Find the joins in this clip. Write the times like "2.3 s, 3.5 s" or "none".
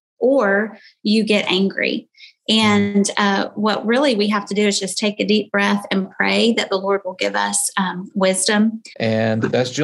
8.9 s